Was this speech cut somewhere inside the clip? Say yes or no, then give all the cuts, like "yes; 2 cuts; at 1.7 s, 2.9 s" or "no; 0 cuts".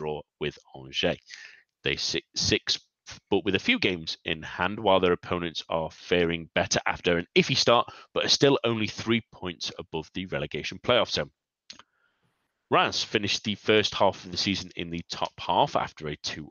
no; 0 cuts